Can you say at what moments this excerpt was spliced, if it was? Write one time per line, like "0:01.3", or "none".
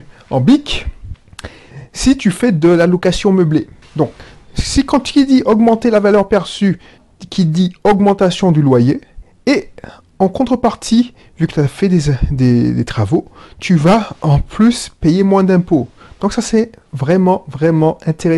0:03.8